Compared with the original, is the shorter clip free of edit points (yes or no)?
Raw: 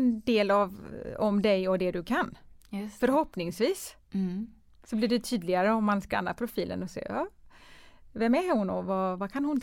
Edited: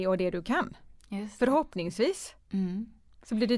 yes